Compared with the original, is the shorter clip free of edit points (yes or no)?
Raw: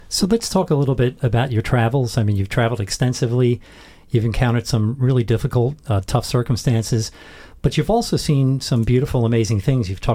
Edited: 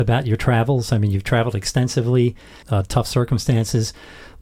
no